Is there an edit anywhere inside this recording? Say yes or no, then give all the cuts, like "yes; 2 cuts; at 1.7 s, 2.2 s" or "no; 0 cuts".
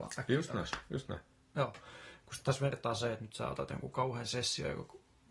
yes; 1 cut; at 2.2 s